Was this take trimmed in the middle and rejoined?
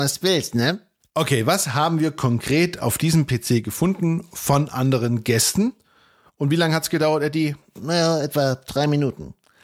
no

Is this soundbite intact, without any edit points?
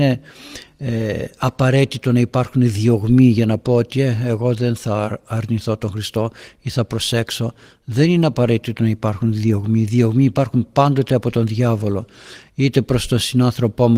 yes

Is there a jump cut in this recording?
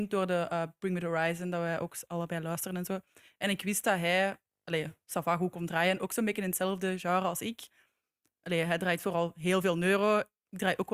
no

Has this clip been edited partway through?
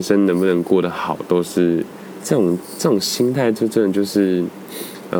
yes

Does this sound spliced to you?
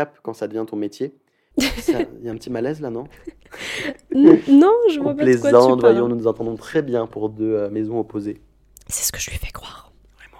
yes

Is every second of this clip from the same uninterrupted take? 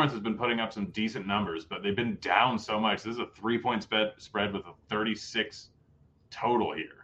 yes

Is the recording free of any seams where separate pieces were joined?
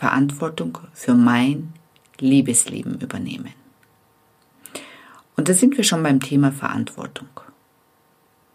yes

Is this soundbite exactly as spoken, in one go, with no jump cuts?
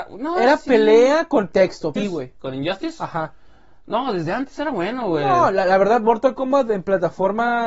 no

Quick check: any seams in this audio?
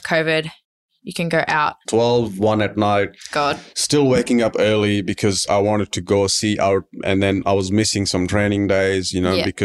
yes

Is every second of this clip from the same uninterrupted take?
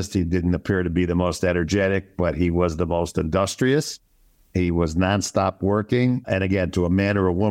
yes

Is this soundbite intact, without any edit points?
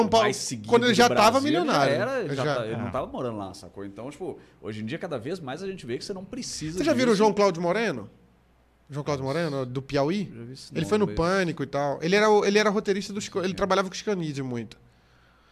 yes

